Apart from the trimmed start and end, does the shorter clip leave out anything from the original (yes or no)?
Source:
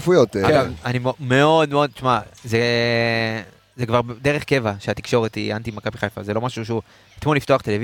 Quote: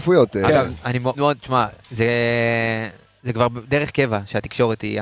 yes